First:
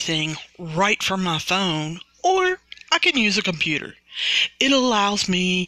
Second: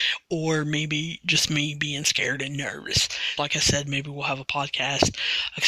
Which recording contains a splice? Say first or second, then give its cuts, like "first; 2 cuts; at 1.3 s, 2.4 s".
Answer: second; 1 cut; at 3.4 s